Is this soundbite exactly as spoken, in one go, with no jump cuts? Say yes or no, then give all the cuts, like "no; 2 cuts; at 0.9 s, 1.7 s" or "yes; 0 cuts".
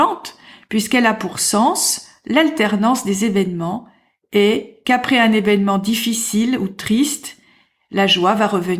yes; 0 cuts